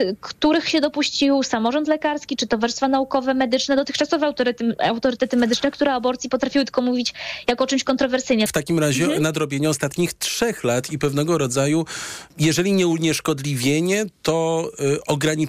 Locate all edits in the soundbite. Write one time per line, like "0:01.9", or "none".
0:08.5
0:12.3